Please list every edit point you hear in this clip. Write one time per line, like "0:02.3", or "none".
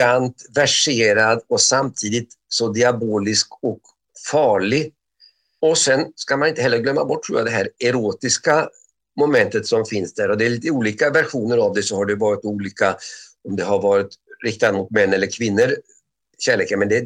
none